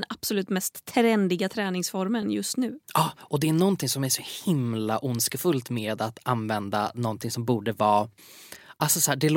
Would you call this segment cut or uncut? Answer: uncut